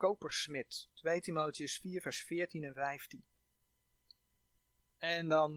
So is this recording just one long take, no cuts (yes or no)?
no